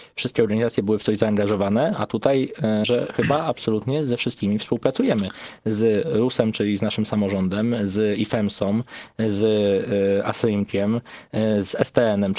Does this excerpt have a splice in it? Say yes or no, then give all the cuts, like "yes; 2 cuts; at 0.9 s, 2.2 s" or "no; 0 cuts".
yes; 1 cut; at 2.8 s